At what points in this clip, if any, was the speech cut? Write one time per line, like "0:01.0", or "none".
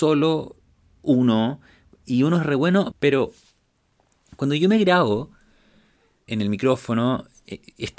0:02.9
0:06.3